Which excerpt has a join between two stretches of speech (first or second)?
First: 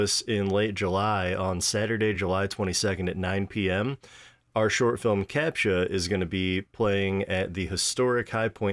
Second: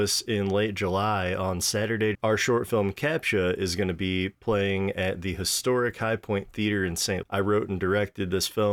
second